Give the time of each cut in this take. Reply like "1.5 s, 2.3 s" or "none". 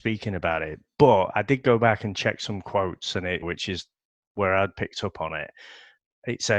3.4 s